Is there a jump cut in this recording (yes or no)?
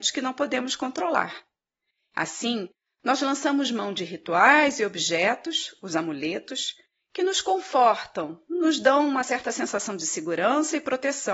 no